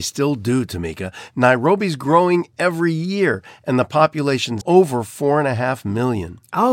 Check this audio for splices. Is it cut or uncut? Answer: cut